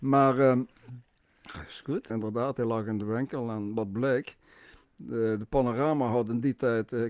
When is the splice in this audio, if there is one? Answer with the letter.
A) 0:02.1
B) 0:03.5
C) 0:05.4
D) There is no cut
A